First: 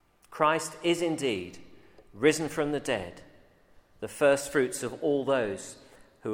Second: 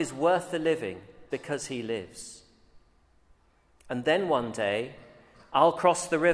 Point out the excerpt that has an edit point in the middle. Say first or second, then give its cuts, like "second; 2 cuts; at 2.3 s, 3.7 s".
second; 1 cut; at 1.3 s